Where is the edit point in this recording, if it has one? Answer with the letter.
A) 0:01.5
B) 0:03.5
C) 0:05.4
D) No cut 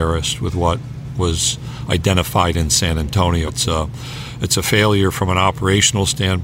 B